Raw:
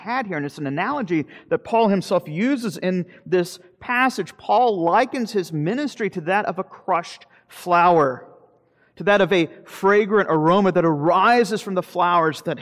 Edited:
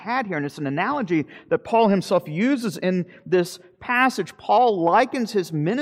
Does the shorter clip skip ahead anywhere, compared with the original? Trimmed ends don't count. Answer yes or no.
no